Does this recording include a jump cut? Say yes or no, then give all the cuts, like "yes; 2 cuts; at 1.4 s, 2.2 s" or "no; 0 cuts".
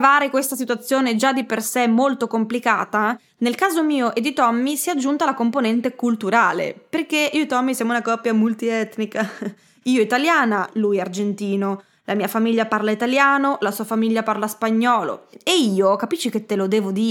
yes; 1 cut; at 15.3 s